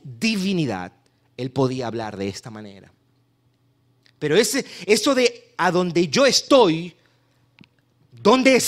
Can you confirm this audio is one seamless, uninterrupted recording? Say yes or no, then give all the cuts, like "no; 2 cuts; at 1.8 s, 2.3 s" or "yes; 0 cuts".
yes; 0 cuts